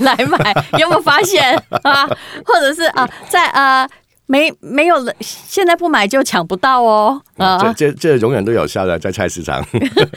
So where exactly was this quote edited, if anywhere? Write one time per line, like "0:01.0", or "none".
none